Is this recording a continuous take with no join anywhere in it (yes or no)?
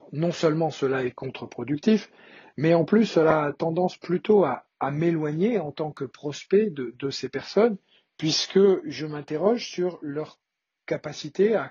yes